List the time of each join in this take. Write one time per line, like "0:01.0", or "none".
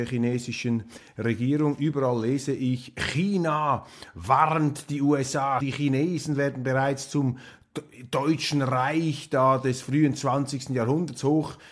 0:05.6